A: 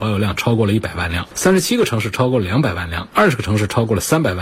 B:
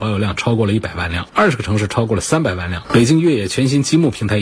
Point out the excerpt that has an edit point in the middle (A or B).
B